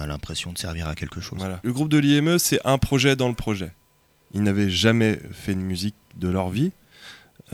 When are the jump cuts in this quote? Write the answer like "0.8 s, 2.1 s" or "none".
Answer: 4.2 s